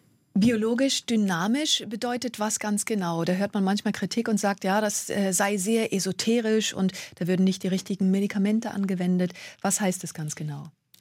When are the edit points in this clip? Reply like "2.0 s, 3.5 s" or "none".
none